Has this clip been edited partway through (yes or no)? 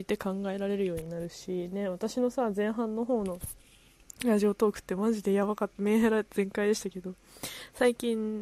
no